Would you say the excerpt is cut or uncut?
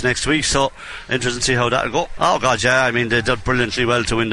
cut